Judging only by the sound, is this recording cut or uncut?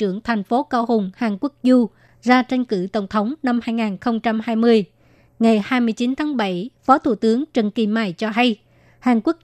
uncut